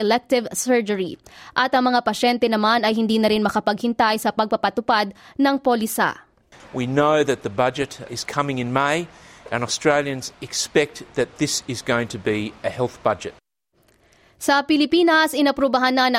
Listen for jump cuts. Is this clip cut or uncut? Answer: cut